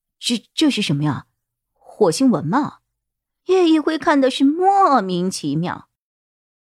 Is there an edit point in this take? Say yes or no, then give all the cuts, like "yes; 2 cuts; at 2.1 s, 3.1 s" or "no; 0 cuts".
no; 0 cuts